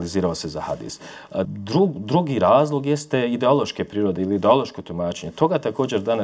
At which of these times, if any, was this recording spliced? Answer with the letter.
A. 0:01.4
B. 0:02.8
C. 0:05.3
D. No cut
A